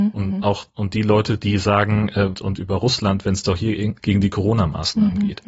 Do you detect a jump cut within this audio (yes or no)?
yes